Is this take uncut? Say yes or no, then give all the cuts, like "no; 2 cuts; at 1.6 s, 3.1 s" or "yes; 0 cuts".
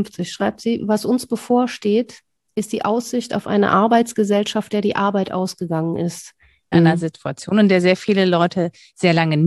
no; 1 cut; at 6.7 s